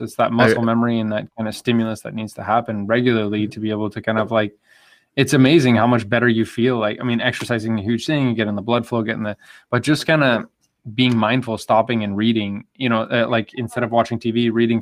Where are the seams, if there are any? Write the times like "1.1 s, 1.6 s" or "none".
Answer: none